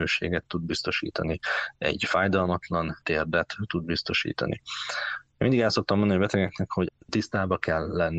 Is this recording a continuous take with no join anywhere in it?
yes; 0 cuts

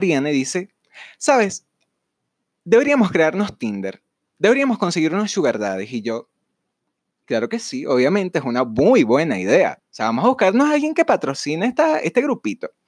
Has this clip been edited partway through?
yes; 1 cut; at 9.8 s

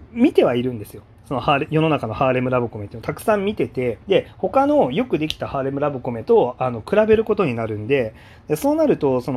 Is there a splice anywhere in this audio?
yes; 1 cut; at 4.0 s

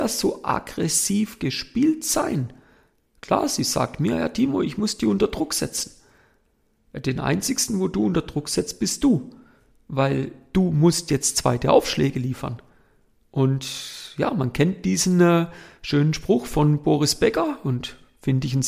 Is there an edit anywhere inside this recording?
no; 0 cuts

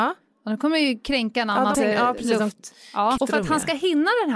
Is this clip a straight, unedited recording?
no; 2 cuts; at 1.7 s, 3.2 s

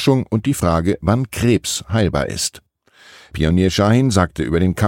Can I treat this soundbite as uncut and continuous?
yes; 0 cuts

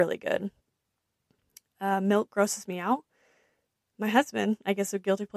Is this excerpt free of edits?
yes; 0 cuts

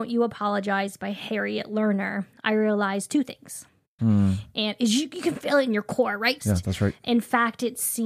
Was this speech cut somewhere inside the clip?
yes; 2 cuts; at 4.0 s, 6.4 s

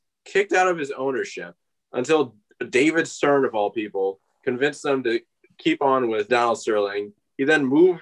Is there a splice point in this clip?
yes; 1 cut; at 6.3 s

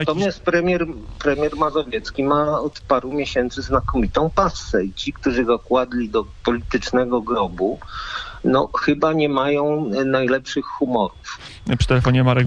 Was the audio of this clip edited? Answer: no; 0 cuts

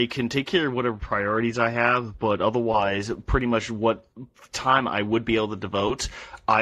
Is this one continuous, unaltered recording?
yes; 0 cuts

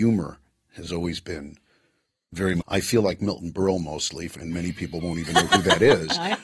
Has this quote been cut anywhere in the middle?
yes; 1 cut; at 2.6 s

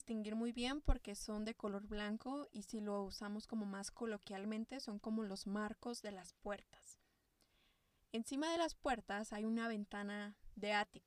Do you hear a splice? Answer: no; 0 cuts

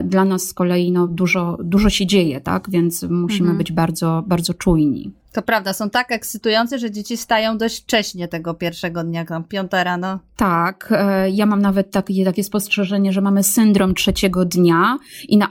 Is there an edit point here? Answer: no; 0 cuts

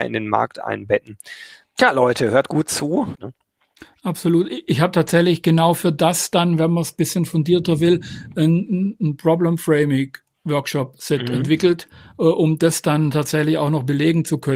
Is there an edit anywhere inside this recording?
yes; 2 cuts; at 1.6 s, 3.1 s

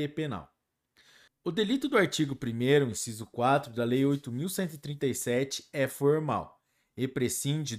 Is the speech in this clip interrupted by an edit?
yes; 1 cut; at 1.3 s

